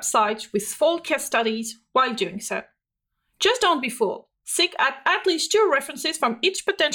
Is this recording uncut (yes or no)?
yes